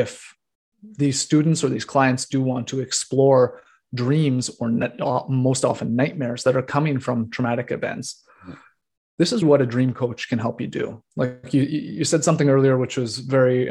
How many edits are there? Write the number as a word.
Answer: one